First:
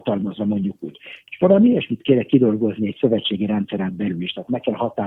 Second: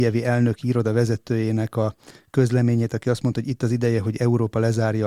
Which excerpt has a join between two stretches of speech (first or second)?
first